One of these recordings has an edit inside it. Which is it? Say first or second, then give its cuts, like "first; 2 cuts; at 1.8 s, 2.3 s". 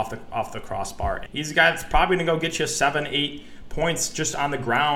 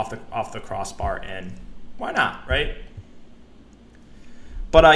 first; 1 cut; at 1.3 s